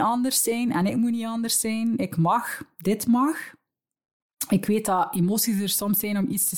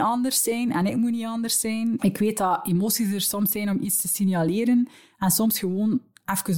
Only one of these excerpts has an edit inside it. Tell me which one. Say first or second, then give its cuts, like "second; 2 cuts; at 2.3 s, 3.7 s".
second; 1 cut; at 2.0 s